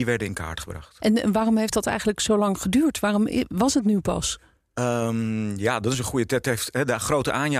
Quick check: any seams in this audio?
yes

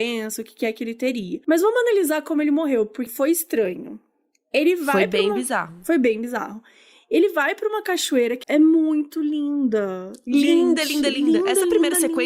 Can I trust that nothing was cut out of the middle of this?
no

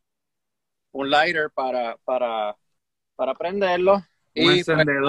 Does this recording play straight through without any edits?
yes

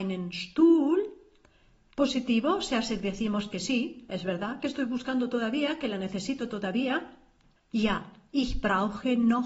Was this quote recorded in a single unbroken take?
yes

